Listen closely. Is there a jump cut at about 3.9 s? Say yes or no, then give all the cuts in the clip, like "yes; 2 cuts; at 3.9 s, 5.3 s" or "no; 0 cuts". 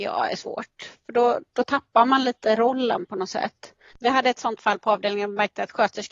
yes; 2 cuts; at 1.5 s, 3.9 s